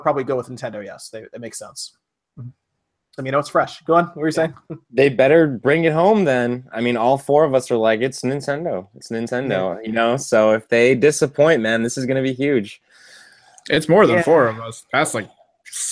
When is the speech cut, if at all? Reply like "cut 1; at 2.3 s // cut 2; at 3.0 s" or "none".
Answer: cut 1; at 3.2 s